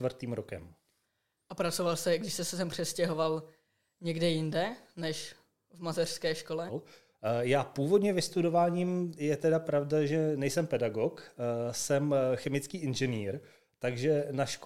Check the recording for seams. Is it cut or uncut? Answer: cut